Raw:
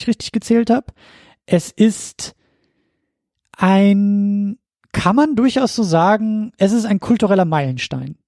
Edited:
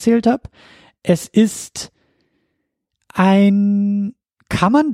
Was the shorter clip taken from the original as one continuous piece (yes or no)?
yes